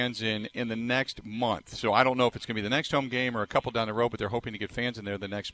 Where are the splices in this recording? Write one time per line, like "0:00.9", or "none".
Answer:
none